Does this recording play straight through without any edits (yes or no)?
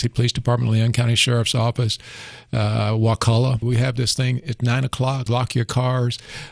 no